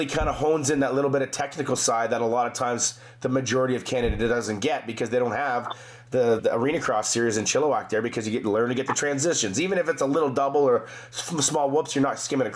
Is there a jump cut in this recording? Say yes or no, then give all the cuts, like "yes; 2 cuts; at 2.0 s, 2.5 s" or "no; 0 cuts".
yes; 1 cut; at 6.4 s